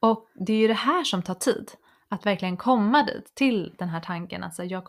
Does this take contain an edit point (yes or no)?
no